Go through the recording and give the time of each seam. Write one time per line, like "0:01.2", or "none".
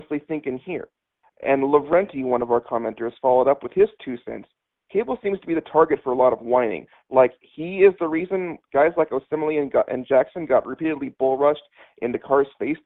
none